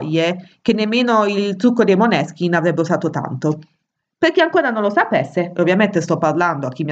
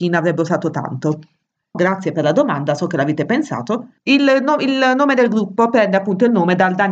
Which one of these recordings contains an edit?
second; 2 cuts; at 1.7 s, 4.0 s

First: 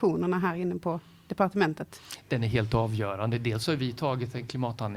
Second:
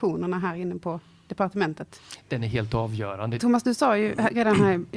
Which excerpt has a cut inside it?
second; 1 cut; at 3.4 s

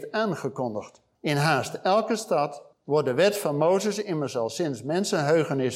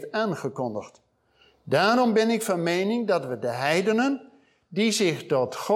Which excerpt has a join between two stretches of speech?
first; 2 cuts; at 1.1 s, 2.7 s

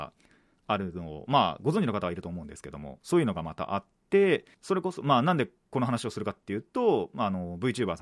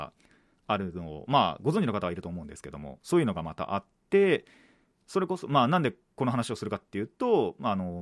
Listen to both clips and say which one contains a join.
first; 1 cut; at 4.5 s

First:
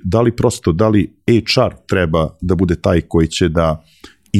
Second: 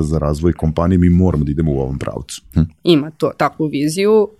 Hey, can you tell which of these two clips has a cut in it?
second; 1 cut; at 2.5 s

